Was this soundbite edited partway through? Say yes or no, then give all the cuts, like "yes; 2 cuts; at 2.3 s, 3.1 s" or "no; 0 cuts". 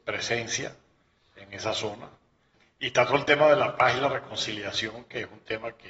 no; 0 cuts